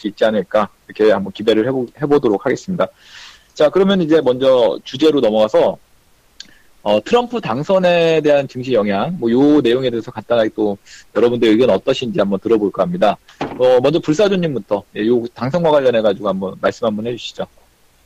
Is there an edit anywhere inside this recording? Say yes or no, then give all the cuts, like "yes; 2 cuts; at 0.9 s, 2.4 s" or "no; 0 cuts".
yes; 1 cut; at 1.9 s